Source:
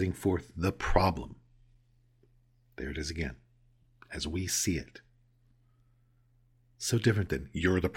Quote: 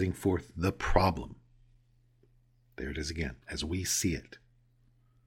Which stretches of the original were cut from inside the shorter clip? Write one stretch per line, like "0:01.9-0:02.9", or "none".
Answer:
0:03.4-0:04.0